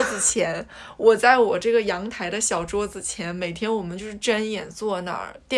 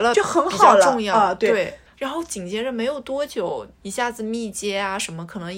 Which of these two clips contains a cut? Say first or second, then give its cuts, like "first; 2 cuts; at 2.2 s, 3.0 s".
second; 2 cuts; at 1.9 s, 3.8 s